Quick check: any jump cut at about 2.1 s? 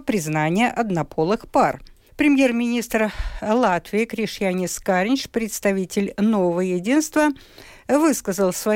yes; 1 cut; at 2.1 s

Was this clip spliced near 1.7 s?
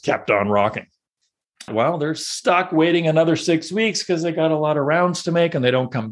yes; 1 cut; at 1.7 s

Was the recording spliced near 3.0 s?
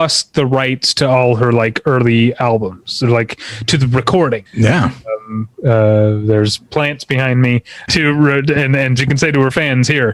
no; 3 cuts; at 4.5 s, 7.9 s, 9.0 s

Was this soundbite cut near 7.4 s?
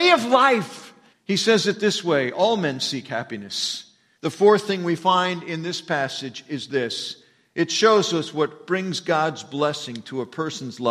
no; 2 cuts; at 1.1 s, 4.1 s

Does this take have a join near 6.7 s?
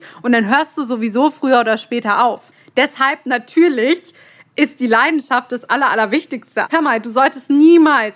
yes; 1 cut; at 6.7 s

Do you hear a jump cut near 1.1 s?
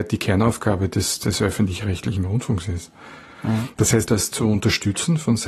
no; 1 cut; at 4.1 s

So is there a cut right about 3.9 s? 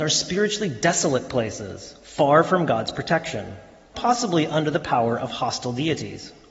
yes; 1 cut; at 3.9 s

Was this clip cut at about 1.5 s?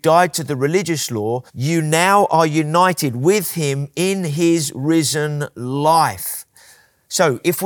yes; 1 cut; at 1.5 s

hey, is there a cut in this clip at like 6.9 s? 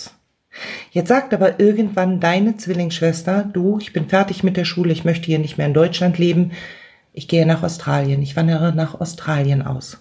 no; 0 cuts

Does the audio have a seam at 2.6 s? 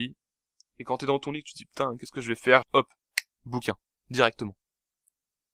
yes; 1 cut; at 2.6 s

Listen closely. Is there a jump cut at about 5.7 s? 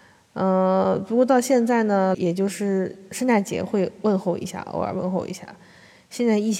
no; 1 cut; at 2.1 s

